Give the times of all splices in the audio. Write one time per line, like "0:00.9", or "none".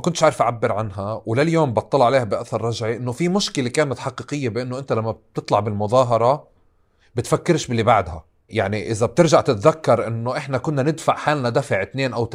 0:08.5